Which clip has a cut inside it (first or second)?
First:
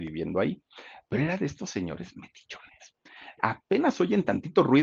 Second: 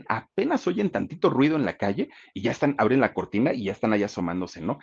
first